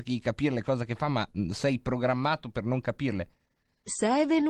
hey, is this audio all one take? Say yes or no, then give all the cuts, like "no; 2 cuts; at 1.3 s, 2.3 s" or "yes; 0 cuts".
yes; 0 cuts